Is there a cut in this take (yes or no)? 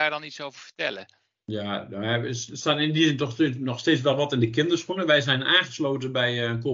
no